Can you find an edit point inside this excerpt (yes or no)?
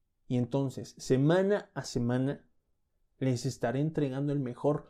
no